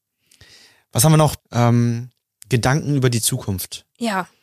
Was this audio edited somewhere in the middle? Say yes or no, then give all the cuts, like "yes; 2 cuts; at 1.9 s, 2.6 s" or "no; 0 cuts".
yes; 1 cut; at 1.4 s